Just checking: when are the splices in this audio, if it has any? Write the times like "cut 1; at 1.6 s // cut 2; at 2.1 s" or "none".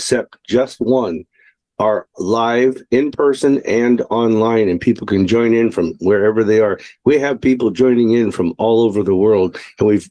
none

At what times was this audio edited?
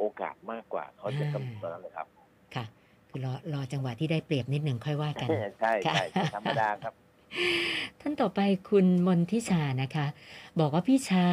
none

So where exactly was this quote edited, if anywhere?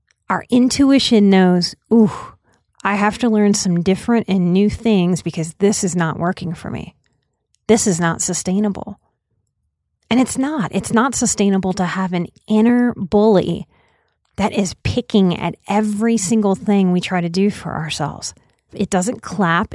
cut 1; at 18.7 s

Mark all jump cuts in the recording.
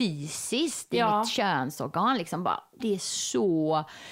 cut 1; at 2.8 s

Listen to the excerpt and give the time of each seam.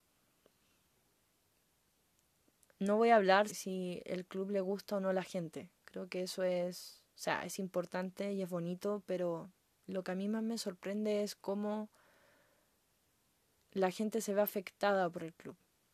cut 1; at 3.5 s

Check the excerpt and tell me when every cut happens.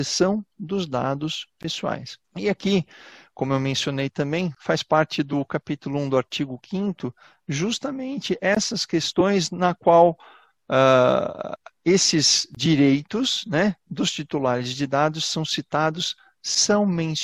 cut 1; at 2.2 s

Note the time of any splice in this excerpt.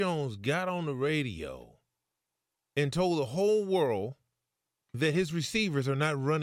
none

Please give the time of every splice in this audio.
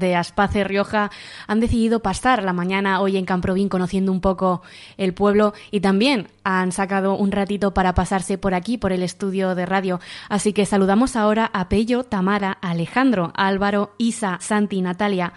cut 1; at 14.4 s

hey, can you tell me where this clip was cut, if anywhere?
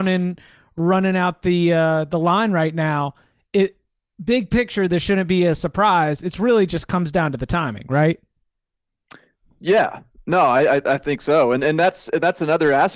none

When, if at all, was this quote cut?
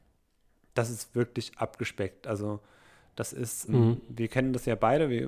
cut 1; at 3.7 s

